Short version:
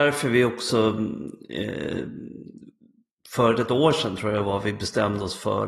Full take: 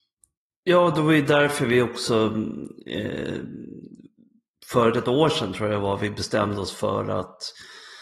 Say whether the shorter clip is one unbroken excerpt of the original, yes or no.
yes